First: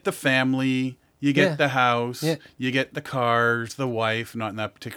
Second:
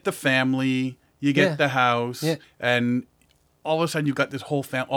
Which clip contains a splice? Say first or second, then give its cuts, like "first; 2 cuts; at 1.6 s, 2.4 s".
second; 1 cut; at 2.4 s